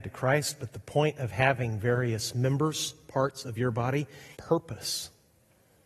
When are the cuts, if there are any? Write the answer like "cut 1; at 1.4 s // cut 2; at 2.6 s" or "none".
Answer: cut 1; at 4.3 s

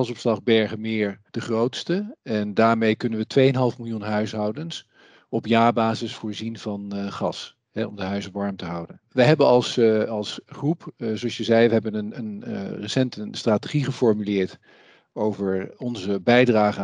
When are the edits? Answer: cut 1; at 1.3 s

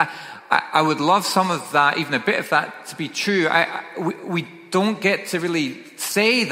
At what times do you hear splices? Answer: none

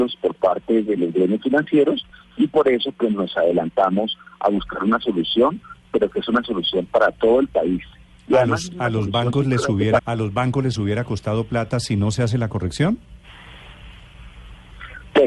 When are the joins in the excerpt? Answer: cut 1; at 10.0 s

